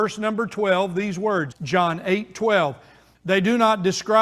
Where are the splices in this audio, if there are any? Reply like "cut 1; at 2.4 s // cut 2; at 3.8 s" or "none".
cut 1; at 1.5 s // cut 2; at 3.1 s